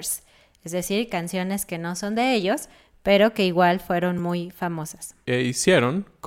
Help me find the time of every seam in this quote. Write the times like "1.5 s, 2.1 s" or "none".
none